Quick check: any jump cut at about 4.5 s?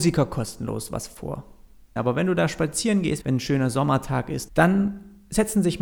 yes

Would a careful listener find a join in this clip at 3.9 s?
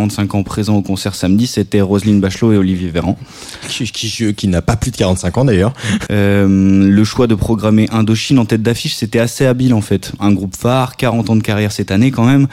no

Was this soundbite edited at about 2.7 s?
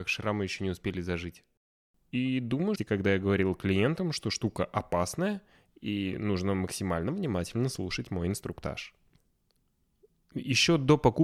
yes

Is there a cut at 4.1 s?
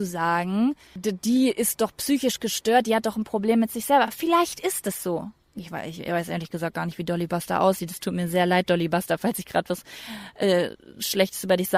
no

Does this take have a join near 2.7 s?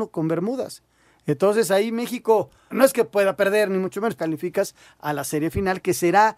yes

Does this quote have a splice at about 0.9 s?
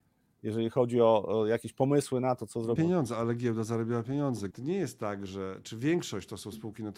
no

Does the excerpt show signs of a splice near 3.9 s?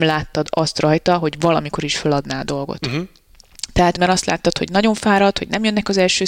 yes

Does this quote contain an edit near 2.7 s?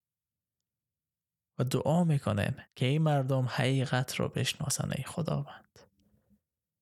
yes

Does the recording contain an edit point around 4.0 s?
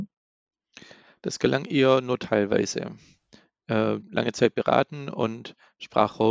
yes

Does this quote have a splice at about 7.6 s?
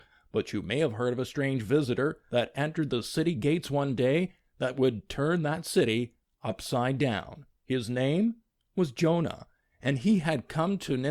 no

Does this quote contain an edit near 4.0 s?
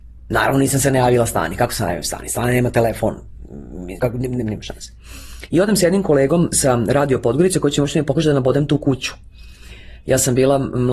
yes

